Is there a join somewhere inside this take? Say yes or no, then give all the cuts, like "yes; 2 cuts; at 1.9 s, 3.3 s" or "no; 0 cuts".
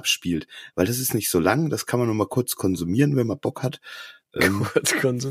no; 0 cuts